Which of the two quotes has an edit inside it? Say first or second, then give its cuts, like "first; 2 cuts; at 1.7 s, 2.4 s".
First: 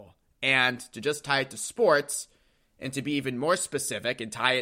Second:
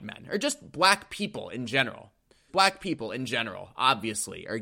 second; 1 cut; at 2.5 s